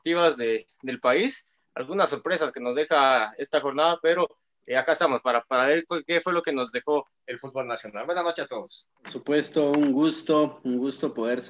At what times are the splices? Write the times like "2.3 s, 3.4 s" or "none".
9.0 s